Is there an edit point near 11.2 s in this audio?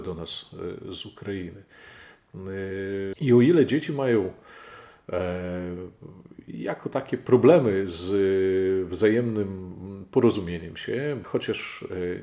yes; 2 cuts; at 3.1 s, 11.2 s

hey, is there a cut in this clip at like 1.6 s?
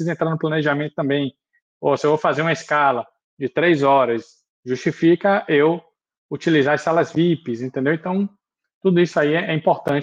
no; 0 cuts

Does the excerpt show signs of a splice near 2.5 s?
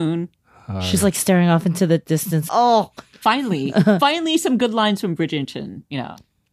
yes; 1 cut; at 2.5 s

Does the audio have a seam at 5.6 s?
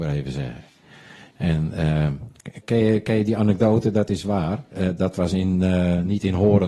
no; 1 cut; at 2.6 s

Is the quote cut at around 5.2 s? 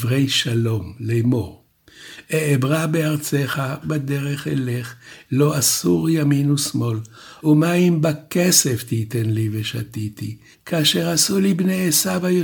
no; 3 cuts; at 3.8 s, 7.4 s, 10.5 s

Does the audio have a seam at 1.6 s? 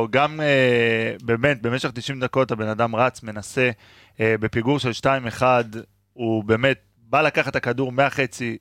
no; 0 cuts

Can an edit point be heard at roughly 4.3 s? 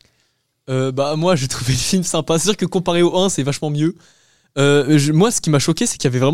no; 0 cuts

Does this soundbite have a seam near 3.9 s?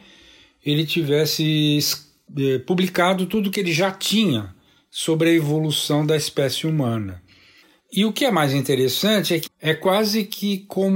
no; 2 cuts; at 7.8 s, 9.5 s

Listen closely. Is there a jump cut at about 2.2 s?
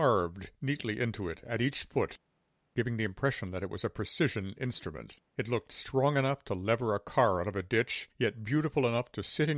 no; 2 cuts; at 5.3 s, 8.1 s

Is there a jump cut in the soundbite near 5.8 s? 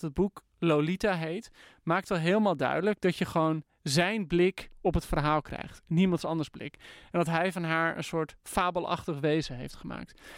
no; 0 cuts

